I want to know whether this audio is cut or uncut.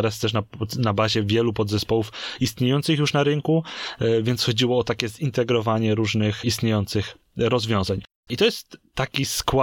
cut